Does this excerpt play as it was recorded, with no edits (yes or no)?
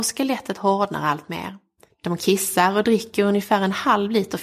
no